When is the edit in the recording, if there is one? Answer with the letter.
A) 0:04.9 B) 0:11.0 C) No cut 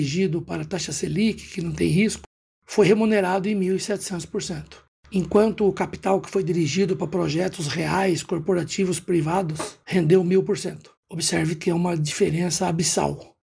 B